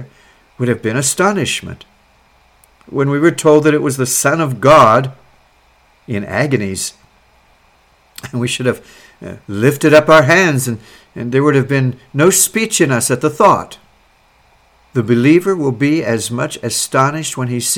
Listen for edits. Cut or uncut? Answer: cut